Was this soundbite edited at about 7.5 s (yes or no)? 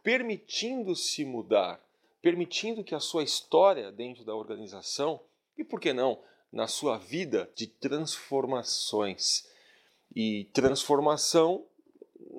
yes